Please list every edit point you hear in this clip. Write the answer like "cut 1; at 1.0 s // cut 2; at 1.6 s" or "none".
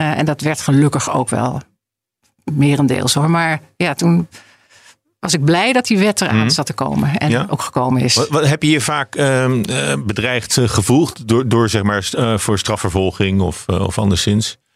none